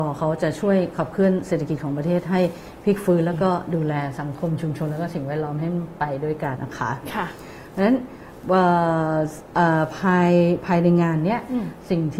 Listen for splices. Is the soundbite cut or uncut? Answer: cut